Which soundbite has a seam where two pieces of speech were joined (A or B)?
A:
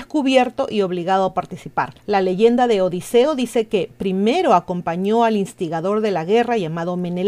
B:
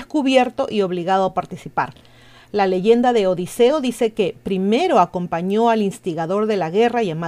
A